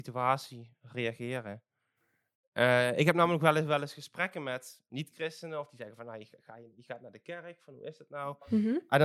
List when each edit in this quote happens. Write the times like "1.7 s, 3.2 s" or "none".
none